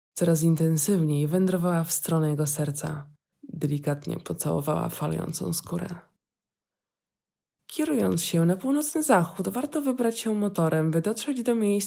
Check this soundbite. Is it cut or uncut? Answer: cut